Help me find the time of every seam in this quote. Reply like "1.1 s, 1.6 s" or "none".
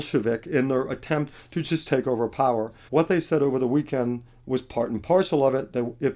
2.9 s